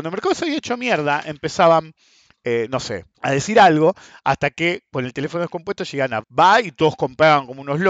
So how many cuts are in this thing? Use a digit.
2